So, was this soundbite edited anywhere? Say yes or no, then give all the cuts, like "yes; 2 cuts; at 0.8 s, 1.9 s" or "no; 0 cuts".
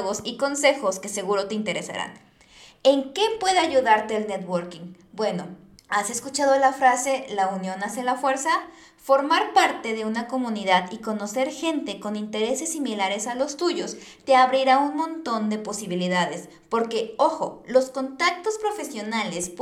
no; 0 cuts